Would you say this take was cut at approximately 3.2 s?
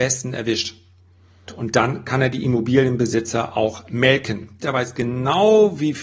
no; 2 cuts; at 1.5 s, 4.6 s

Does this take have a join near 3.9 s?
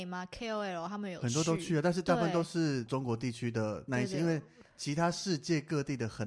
yes; 1 cut; at 3.9 s

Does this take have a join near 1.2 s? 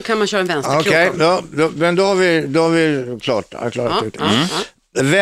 yes; 1 cut; at 1.2 s

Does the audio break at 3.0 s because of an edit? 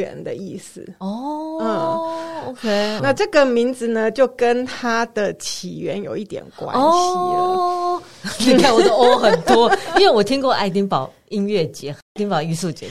yes; 1 cut; at 3.0 s

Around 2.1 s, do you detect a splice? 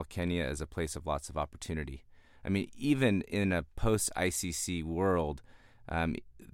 no; 0 cuts

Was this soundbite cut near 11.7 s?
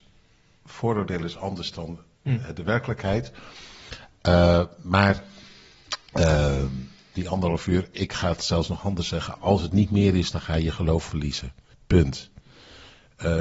no; 1 cut; at 7.1 s

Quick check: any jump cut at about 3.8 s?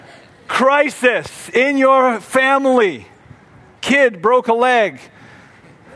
yes; 1 cut; at 3.8 s

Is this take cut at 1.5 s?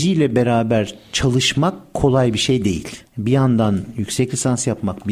no; 1 cut; at 3.1 s

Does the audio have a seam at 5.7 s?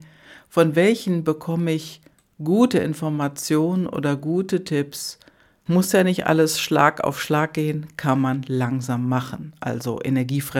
yes; 1 cut; at 5.7 s

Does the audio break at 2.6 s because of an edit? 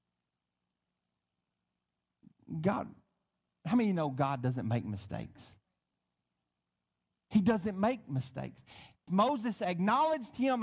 no; 1 cut; at 9.1 s

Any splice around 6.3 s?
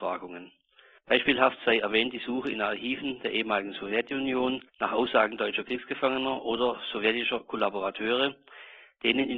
no; 2 cuts; at 1.0 s, 4.7 s

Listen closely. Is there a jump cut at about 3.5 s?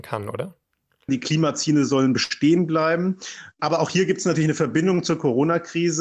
no; 1 cut; at 1.1 s

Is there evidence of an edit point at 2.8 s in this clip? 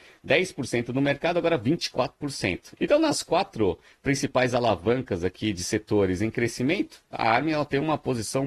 yes; 1 cut; at 2.8 s

